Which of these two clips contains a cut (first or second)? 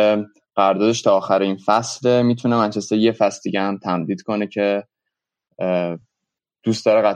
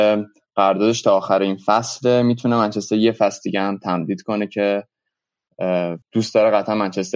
second